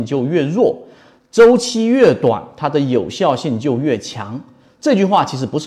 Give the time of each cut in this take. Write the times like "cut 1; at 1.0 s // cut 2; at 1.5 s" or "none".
none